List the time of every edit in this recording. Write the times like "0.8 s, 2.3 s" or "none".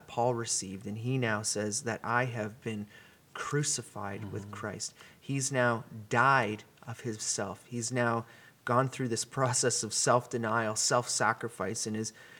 none